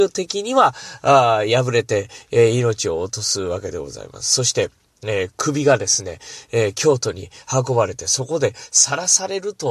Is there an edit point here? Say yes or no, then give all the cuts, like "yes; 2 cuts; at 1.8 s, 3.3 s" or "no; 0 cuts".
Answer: no; 0 cuts